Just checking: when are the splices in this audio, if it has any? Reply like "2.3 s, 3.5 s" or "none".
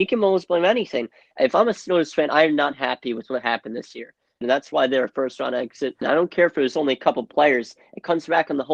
4.4 s, 6.0 s